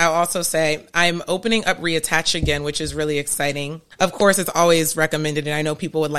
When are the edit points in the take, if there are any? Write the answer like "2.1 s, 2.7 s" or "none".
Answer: 3.9 s